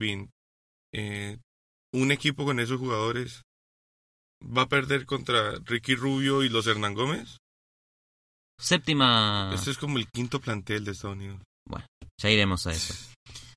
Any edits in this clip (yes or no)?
yes